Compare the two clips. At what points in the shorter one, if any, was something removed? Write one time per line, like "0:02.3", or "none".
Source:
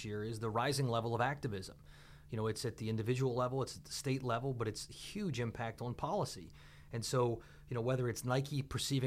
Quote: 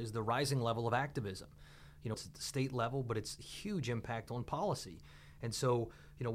0:02.1